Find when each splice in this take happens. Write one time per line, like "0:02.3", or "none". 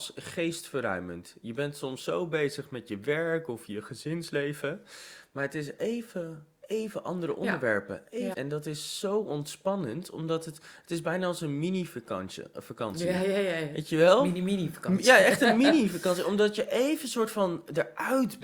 0:08.3